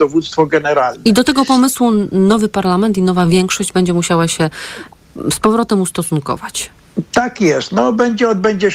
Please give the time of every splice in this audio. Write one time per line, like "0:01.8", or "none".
none